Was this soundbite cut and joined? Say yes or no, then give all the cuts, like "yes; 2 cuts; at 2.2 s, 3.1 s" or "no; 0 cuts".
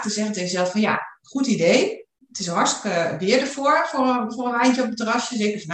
no; 0 cuts